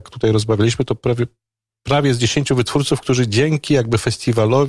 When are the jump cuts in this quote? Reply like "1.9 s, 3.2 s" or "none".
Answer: none